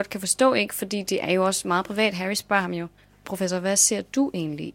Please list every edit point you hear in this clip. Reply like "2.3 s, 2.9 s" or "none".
none